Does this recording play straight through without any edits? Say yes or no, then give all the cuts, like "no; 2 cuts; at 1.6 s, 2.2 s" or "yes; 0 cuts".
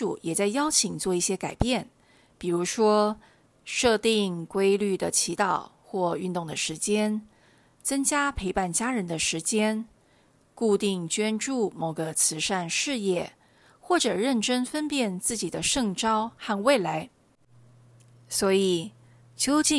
yes; 0 cuts